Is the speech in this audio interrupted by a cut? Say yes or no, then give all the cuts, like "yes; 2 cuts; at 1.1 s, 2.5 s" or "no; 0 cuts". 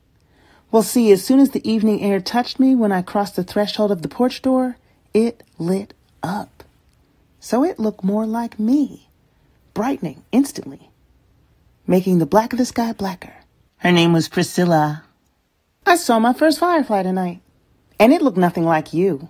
yes; 1 cut; at 13.7 s